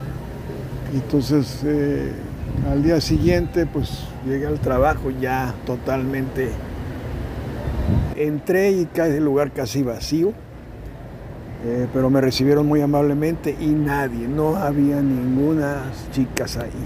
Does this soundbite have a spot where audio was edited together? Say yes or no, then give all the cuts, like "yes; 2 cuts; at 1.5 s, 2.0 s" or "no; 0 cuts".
yes; 1 cut; at 8.1 s